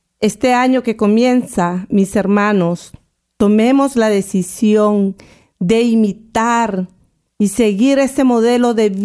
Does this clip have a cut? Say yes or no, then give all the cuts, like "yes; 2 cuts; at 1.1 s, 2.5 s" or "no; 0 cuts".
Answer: no; 0 cuts